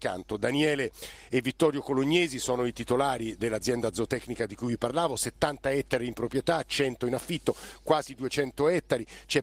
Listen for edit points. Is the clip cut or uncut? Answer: uncut